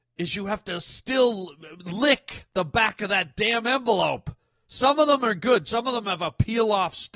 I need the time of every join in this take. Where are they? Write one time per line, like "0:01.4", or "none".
none